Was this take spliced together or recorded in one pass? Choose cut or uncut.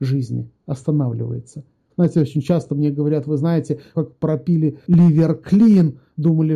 cut